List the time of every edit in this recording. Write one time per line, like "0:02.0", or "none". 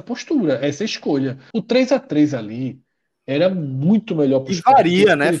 0:01.5